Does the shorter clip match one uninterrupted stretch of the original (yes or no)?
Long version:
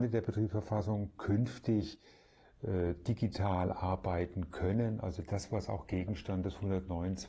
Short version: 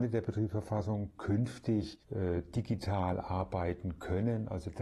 no